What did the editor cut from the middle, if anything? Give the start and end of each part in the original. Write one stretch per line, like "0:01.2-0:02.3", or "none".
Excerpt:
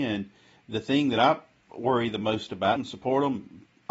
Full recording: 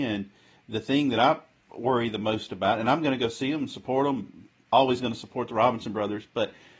0:02.8-0:03.6